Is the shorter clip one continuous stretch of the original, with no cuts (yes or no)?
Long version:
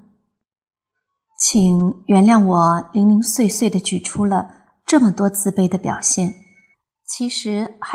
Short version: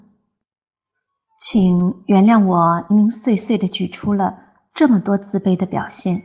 no